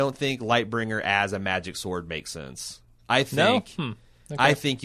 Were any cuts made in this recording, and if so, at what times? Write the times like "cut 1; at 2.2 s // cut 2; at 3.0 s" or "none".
none